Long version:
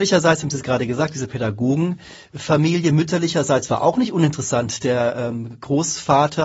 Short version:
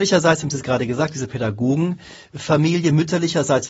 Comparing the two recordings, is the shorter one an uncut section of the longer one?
yes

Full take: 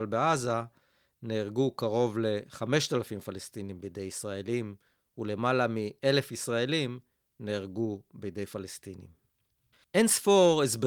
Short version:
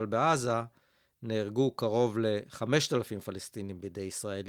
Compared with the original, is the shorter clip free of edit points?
yes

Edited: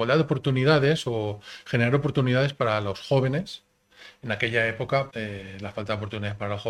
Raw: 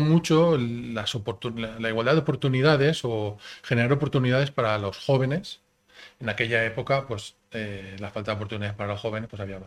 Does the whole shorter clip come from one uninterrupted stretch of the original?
no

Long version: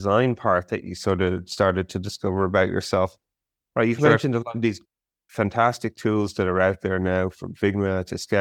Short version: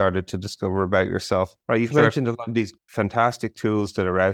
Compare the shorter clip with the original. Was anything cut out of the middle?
yes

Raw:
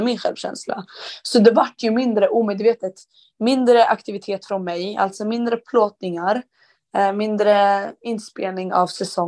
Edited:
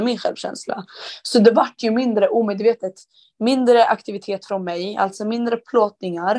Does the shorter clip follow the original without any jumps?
yes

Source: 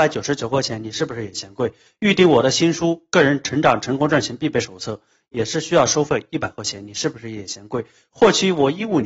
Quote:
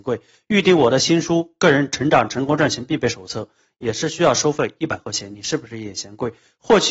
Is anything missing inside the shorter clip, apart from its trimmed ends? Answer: no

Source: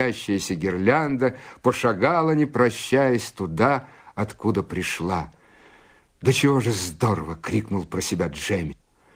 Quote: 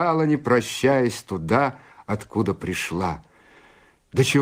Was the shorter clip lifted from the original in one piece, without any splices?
yes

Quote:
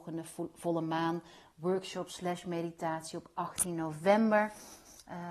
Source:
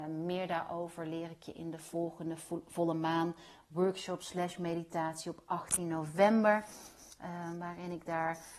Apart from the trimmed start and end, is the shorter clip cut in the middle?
no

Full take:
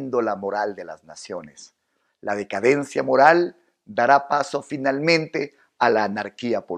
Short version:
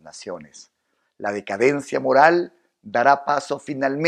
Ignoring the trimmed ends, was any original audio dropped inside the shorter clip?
no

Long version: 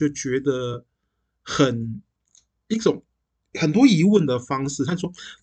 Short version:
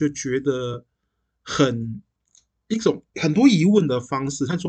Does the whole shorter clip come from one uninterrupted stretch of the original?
no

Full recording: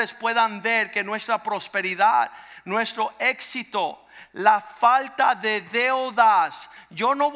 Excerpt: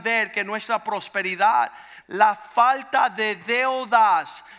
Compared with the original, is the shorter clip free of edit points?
no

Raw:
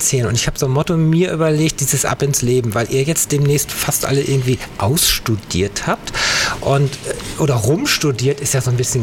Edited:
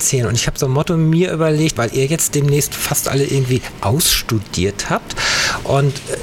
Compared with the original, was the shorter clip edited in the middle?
yes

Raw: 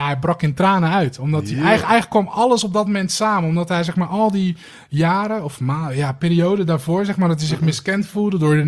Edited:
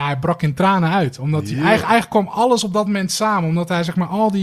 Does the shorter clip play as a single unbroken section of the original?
yes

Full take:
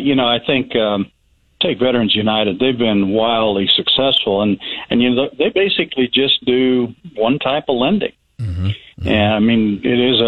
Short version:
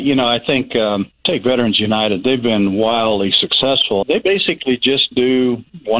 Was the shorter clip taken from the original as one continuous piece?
no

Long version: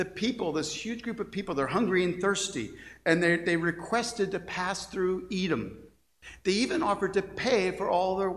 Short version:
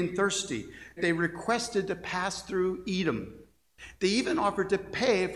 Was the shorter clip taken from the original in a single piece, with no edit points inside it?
no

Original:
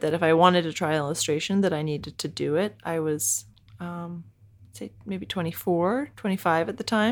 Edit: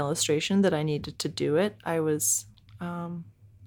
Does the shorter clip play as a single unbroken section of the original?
yes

